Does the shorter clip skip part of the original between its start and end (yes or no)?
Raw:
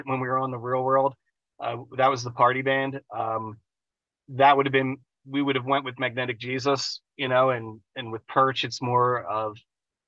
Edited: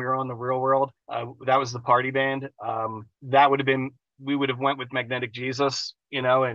yes